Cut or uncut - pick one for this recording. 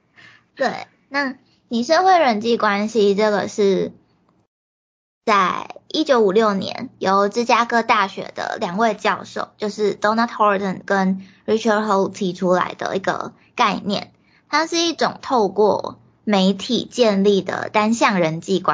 uncut